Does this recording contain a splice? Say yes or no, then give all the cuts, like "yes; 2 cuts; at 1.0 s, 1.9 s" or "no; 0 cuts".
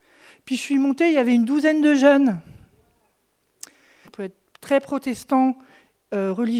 yes; 1 cut; at 4.0 s